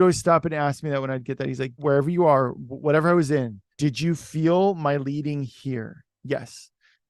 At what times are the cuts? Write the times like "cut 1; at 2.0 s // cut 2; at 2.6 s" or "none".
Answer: cut 1; at 1.8 s // cut 2; at 3.7 s